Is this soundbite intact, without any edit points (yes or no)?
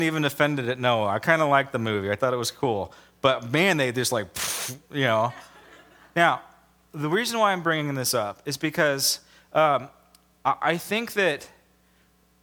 no